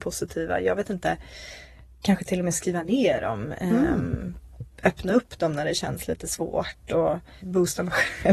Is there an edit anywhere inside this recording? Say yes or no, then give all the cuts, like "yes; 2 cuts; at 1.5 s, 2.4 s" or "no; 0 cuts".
no; 0 cuts